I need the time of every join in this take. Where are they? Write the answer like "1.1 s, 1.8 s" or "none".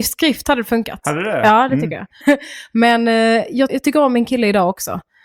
2.2 s, 3.7 s